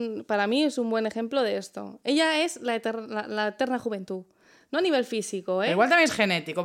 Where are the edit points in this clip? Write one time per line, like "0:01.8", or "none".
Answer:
none